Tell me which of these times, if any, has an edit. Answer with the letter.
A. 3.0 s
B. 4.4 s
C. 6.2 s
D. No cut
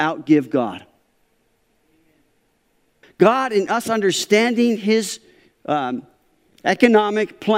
A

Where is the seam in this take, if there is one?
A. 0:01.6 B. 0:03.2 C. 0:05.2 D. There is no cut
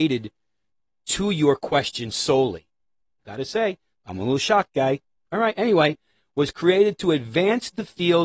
B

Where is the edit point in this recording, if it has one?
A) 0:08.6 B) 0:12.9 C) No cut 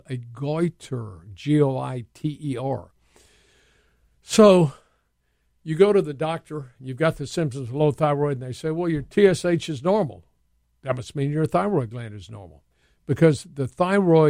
B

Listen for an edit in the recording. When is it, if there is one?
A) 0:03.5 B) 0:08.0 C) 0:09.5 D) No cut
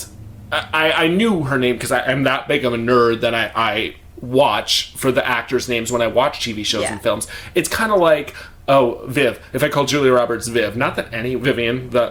C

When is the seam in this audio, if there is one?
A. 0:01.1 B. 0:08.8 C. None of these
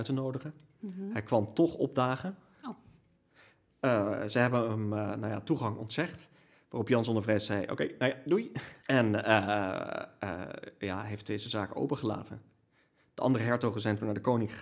B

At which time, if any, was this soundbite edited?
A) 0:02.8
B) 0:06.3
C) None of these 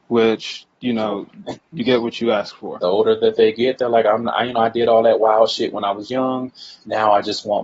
A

